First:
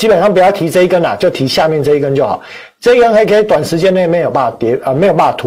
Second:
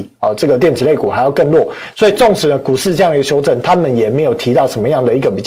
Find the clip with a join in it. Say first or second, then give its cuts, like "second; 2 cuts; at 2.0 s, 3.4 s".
second; 1 cut; at 1.9 s